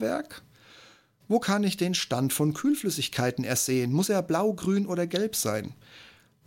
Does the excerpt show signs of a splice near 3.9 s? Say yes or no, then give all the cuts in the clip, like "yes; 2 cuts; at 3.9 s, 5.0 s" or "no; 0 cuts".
no; 0 cuts